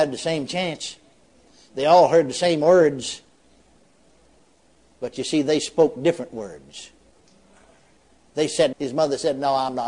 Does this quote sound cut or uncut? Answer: cut